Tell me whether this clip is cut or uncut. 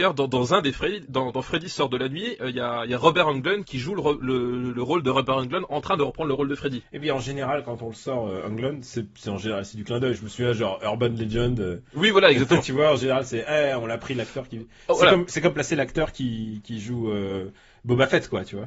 uncut